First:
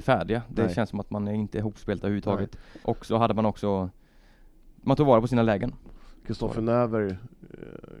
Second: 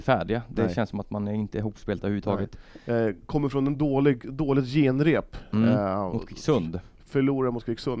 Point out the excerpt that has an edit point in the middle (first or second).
first